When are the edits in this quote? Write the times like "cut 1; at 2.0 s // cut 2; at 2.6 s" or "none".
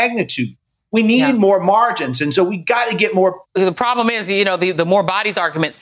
cut 1; at 3.4 s